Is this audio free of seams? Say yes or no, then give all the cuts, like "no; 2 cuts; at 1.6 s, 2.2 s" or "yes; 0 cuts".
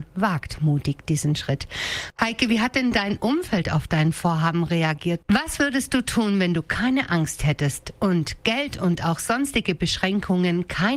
no; 1 cut; at 5.2 s